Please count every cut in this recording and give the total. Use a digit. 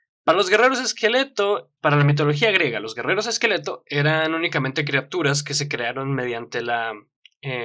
1